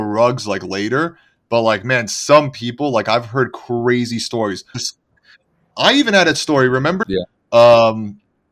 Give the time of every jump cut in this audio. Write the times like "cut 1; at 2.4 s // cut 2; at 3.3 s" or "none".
cut 1; at 4.7 s // cut 2; at 7.0 s